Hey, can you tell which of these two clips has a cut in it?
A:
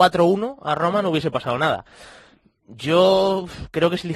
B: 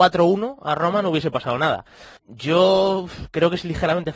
B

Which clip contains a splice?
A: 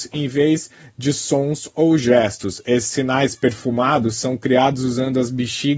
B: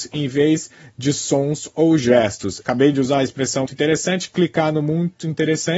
B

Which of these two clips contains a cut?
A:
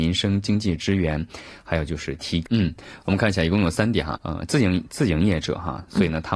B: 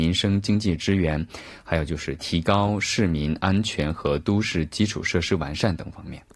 A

